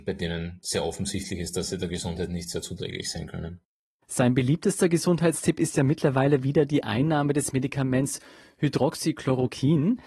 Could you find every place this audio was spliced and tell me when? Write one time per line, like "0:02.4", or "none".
none